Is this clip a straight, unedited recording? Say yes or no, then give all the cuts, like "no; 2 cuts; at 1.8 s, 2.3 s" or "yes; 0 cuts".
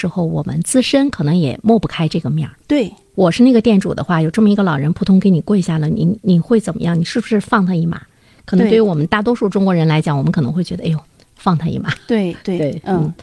yes; 0 cuts